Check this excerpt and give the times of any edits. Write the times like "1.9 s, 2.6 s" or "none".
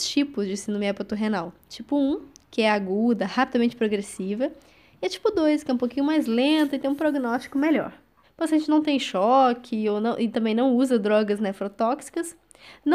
8.2 s